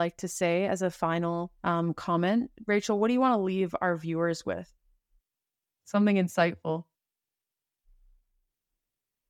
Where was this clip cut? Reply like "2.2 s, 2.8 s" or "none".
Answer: 1.6 s